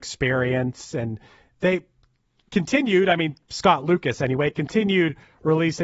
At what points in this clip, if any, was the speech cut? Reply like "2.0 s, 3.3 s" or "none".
none